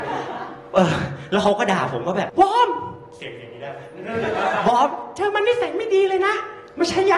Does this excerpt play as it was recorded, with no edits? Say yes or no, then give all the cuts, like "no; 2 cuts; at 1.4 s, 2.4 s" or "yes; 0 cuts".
no; 1 cut; at 2.3 s